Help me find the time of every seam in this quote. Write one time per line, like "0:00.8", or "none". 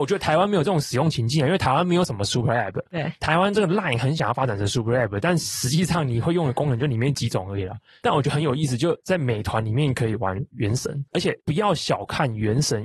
none